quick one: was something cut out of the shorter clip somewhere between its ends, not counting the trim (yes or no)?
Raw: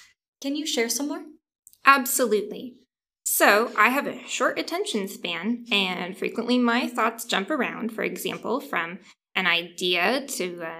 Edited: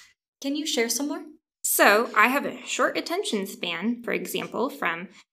yes